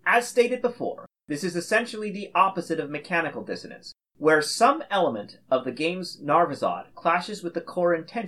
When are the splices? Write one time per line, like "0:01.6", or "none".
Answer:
none